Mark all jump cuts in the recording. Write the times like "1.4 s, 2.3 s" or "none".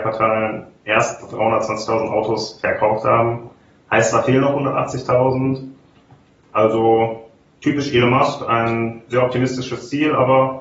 none